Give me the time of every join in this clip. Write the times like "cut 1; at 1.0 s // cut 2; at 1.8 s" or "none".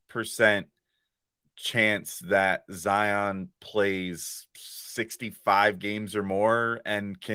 cut 1; at 4.5 s